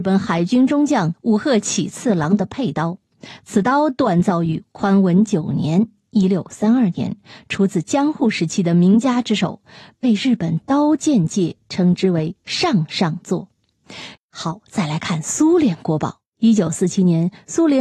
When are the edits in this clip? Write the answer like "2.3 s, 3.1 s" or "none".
14.2 s